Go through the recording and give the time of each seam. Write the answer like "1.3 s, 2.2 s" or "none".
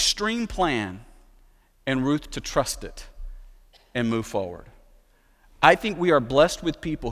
none

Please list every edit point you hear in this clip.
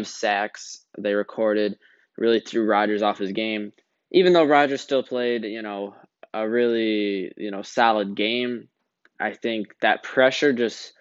none

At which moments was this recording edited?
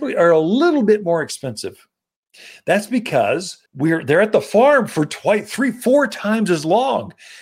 3.7 s

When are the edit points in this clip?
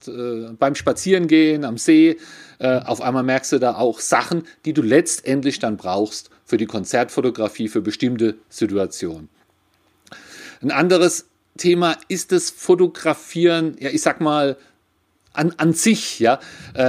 none

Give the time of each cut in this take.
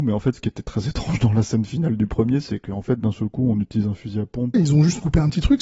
4.5 s

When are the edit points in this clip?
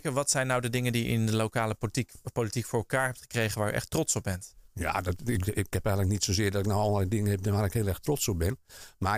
4.7 s

